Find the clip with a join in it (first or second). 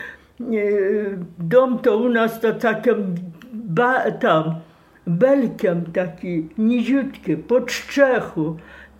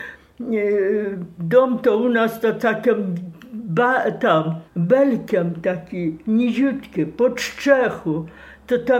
second